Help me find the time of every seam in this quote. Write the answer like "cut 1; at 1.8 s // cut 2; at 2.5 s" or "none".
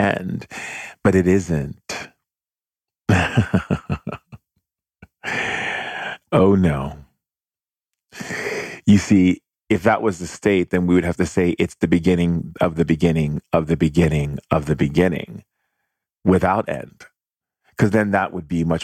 none